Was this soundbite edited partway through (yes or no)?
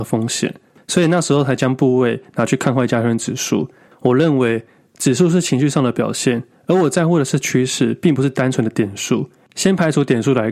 yes